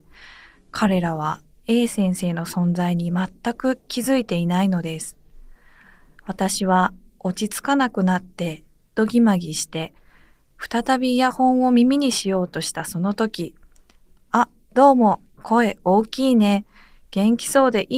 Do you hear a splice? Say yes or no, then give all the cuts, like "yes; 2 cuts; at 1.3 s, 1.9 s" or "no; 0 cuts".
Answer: yes; 1 cut; at 15.3 s